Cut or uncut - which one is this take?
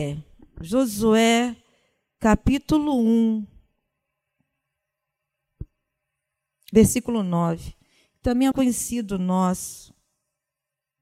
cut